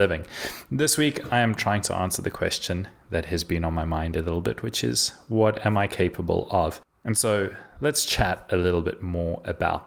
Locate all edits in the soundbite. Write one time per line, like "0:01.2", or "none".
none